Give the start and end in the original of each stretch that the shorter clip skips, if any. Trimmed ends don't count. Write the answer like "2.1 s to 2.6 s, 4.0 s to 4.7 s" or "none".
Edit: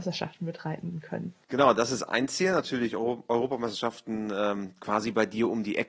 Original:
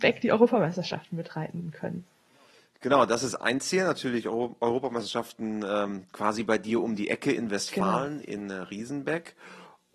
2.1 s to 2.8 s

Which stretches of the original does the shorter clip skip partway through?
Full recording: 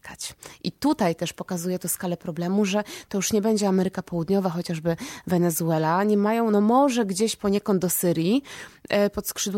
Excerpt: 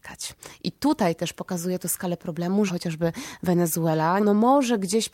2.7 s to 4.5 s, 6.0 s to 6.5 s

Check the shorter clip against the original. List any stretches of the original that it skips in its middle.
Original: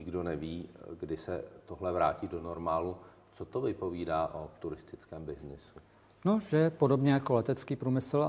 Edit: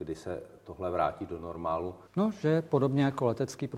3.1 s to 6.1 s

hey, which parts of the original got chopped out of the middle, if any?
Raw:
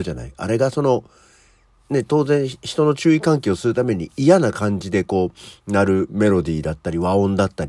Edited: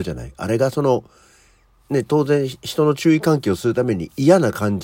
none

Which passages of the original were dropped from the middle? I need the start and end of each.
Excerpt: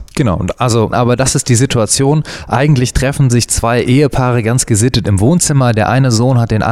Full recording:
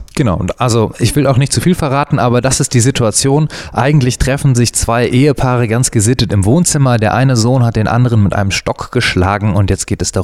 0.9 s to 2.2 s

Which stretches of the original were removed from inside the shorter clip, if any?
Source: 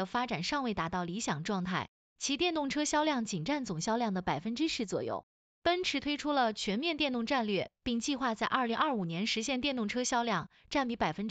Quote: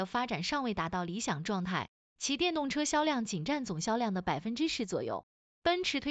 none

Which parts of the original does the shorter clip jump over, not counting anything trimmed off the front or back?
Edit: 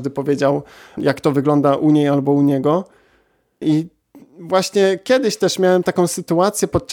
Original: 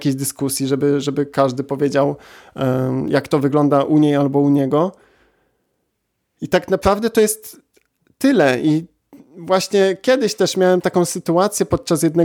2.5 s to 3.0 s, 5.7 s to 8.6 s

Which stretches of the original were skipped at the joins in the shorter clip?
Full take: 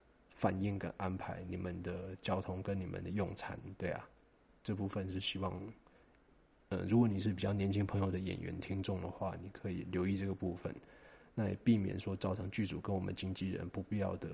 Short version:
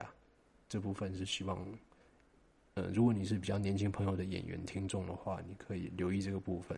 none

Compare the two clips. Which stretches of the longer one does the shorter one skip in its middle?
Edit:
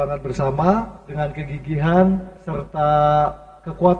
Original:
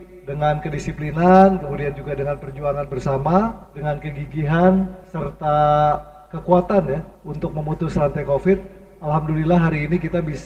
none

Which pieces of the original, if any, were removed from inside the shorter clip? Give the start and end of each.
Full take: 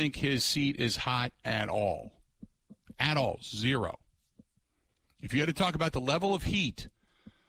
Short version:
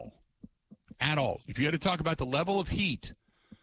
3.4 s to 5.1 s

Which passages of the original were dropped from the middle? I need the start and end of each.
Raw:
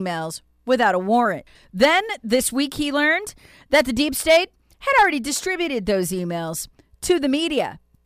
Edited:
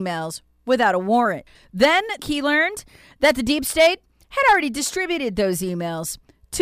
2.2 s to 2.7 s

